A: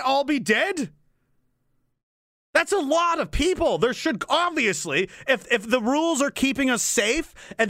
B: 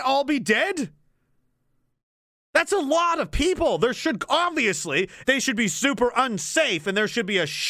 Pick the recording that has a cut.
B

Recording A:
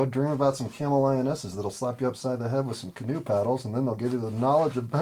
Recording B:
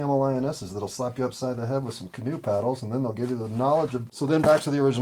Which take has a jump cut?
B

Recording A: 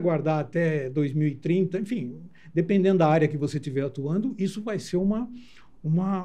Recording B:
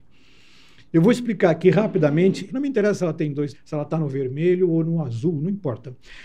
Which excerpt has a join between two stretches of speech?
B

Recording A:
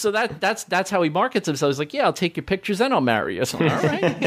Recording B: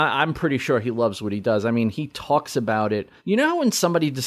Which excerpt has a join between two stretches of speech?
B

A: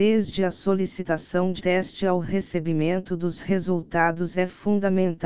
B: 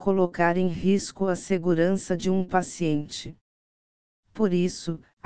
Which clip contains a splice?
A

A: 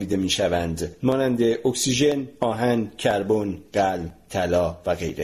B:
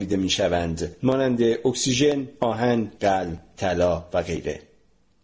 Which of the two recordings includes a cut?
B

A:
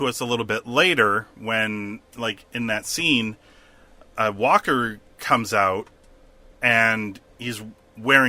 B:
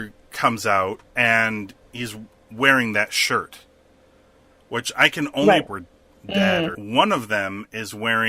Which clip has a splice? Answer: B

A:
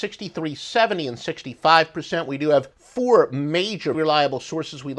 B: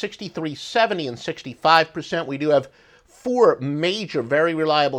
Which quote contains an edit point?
A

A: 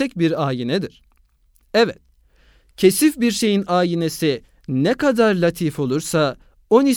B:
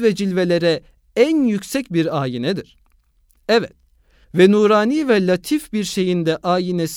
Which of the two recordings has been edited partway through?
B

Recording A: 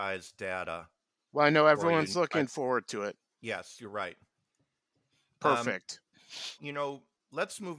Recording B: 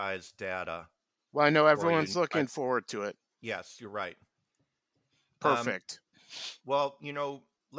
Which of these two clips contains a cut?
A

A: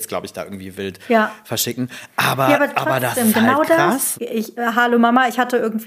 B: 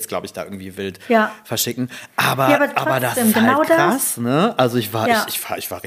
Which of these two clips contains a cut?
A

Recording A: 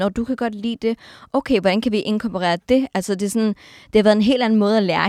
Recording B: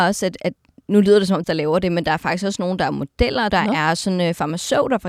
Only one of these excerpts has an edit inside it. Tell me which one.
B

